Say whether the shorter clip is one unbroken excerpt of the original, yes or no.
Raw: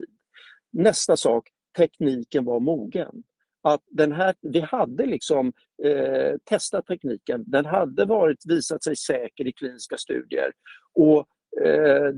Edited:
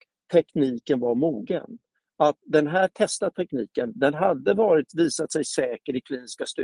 no